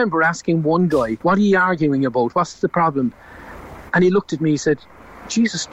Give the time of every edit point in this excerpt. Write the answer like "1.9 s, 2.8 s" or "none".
1.2 s